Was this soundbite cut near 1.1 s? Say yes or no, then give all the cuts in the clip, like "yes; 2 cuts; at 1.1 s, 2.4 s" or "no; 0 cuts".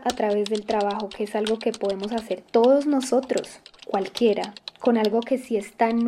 no; 1 cut; at 3.8 s